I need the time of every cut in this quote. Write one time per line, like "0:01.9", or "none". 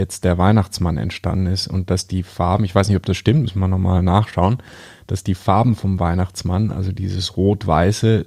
none